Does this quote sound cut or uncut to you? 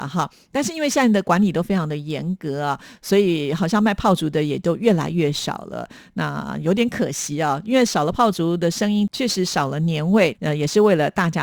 cut